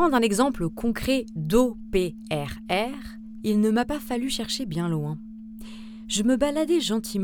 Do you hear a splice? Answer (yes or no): no